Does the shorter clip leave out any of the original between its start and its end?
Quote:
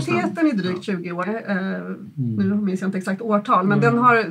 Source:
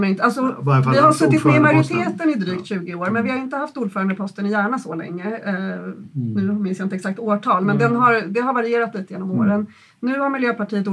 yes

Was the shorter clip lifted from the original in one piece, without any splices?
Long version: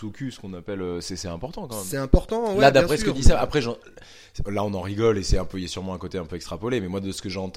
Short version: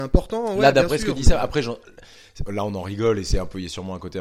yes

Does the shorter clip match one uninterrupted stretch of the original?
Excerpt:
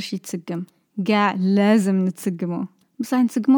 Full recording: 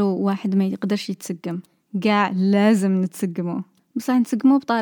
yes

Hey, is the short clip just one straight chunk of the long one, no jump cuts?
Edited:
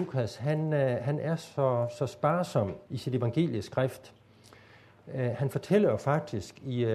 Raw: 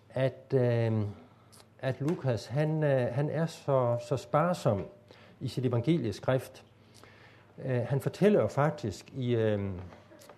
no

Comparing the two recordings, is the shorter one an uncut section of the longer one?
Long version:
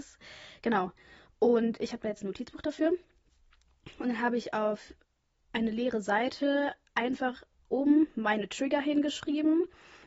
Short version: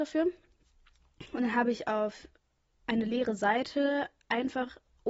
yes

